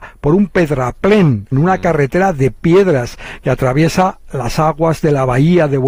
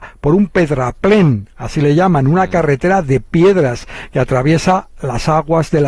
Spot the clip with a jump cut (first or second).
first